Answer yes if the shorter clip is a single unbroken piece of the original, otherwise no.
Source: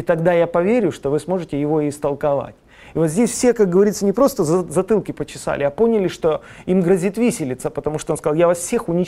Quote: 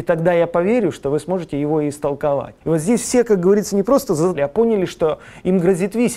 no